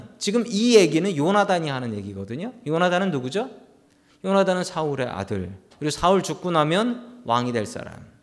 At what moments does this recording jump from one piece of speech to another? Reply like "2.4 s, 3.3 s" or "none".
5.7 s